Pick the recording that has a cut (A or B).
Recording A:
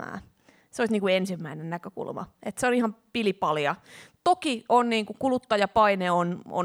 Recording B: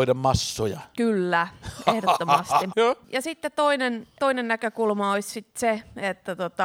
B